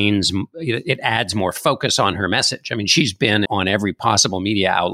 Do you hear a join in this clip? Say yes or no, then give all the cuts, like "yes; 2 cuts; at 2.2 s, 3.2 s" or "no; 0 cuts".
yes; 1 cut; at 3.5 s